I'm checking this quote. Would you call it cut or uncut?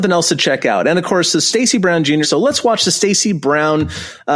cut